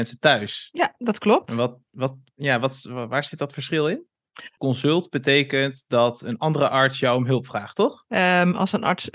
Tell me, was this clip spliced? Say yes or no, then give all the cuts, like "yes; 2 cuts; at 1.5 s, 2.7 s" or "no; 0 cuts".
yes; 2 cuts; at 4.6 s, 8.0 s